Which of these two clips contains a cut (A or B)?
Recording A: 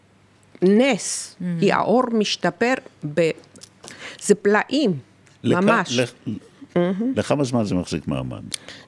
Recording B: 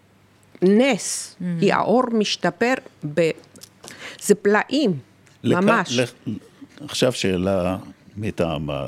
A